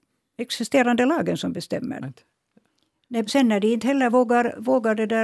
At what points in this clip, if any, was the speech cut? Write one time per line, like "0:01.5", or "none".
0:02.0
0:03.3